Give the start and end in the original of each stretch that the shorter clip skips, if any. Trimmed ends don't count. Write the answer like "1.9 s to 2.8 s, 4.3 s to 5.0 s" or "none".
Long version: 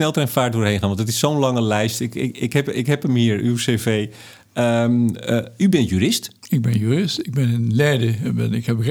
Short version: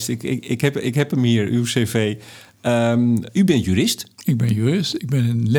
5.2 s to 5.5 s